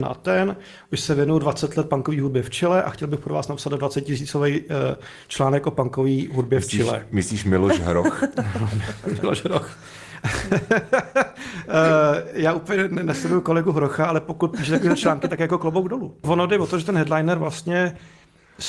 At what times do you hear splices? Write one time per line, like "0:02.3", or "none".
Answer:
none